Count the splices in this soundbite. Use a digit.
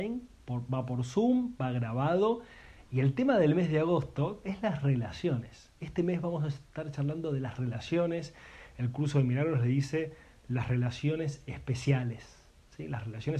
1